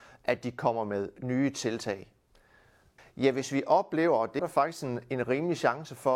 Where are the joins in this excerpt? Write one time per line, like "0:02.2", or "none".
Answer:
0:03.0
0:04.4